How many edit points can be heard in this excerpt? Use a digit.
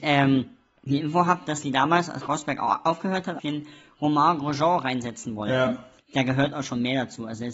2